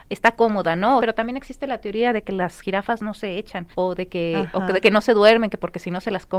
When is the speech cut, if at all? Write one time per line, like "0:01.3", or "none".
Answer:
0:01.0
0:03.7